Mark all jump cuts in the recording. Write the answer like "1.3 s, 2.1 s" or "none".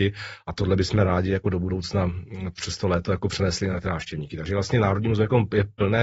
none